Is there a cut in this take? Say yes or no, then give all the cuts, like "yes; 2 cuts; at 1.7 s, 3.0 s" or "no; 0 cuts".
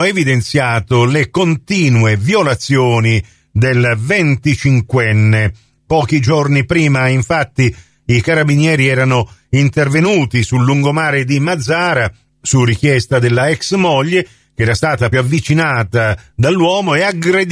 yes; 1 cut; at 15.1 s